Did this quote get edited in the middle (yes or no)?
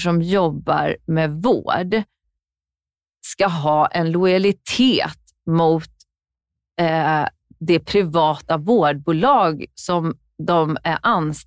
no